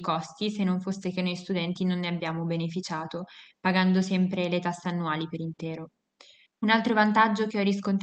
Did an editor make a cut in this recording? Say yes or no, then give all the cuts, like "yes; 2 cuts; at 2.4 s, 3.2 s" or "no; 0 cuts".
yes; 1 cut; at 6.5 s